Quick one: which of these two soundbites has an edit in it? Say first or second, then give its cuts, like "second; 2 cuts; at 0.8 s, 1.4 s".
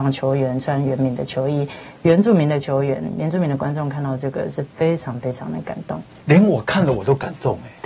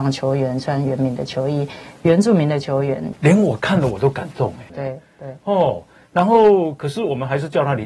second; 2 cuts; at 3.1 s, 4.7 s